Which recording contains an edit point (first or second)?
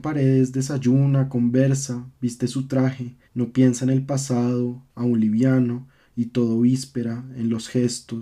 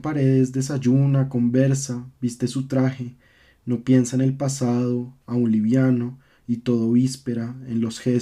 first